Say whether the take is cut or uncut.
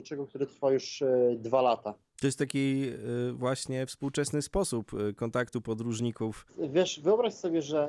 uncut